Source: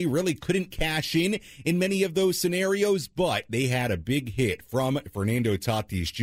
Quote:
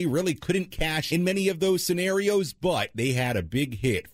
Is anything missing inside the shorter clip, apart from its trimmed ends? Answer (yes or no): yes